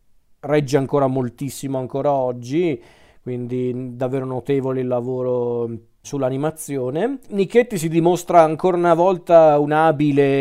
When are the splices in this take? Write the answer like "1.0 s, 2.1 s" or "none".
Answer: 6.0 s, 7.2 s